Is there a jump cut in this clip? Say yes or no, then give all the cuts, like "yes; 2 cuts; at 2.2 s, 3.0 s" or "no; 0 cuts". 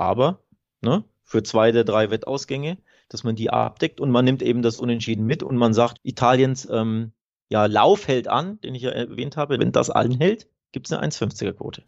yes; 2 cuts; at 6.0 s, 9.6 s